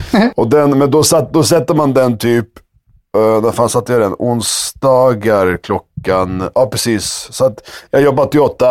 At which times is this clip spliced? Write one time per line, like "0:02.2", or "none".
none